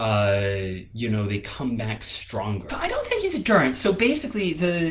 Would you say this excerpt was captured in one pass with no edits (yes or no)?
no